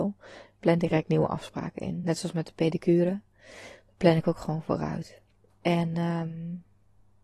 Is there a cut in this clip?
no; 0 cuts

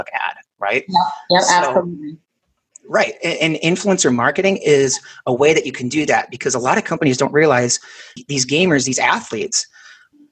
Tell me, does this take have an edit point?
no; 0 cuts

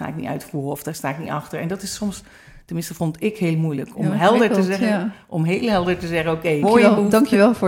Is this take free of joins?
no; 1 cut; at 6.6 s

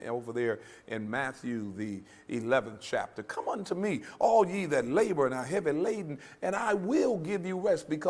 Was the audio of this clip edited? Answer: no; 0 cuts

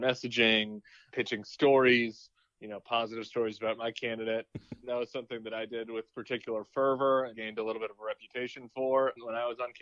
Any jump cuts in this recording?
yes; 2 cuts; at 4.5 s, 7.3 s

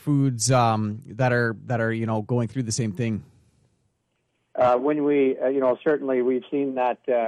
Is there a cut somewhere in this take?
yes; 1 cut; at 4.5 s

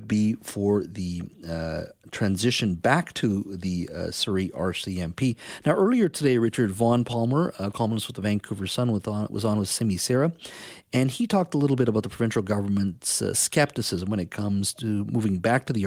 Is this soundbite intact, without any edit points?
yes; 0 cuts

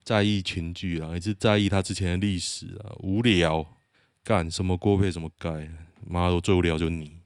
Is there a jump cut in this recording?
no; 0 cuts

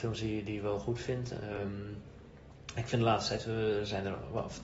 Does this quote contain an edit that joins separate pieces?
no; 0 cuts

